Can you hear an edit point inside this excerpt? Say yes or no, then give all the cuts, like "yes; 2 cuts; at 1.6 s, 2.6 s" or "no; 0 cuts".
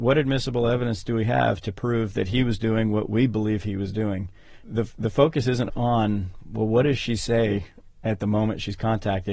yes; 2 cuts; at 4.6 s, 5.7 s